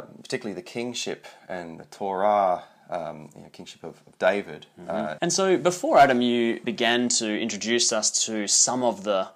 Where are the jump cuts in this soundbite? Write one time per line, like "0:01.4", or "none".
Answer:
0:05.2
0:06.6